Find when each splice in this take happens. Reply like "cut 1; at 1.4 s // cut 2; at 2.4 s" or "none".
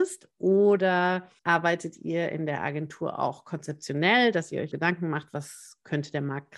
cut 1; at 1.4 s // cut 2; at 4.7 s